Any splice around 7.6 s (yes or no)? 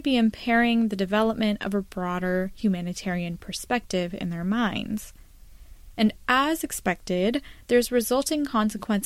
yes